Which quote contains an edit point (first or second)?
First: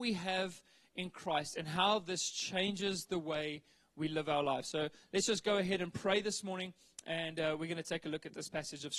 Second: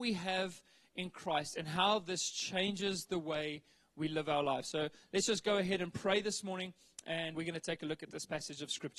second